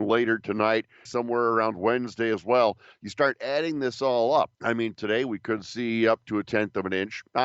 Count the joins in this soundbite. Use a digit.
2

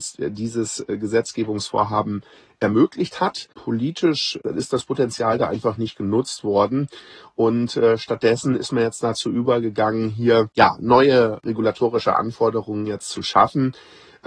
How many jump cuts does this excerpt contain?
0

